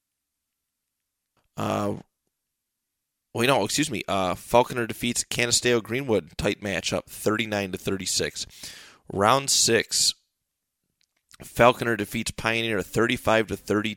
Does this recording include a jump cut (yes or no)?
yes